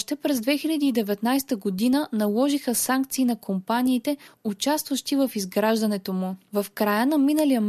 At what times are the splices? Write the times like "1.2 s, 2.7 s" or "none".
6.5 s

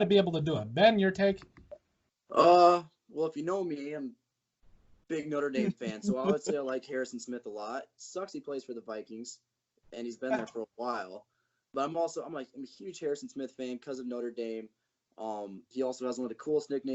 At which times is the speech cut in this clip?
none

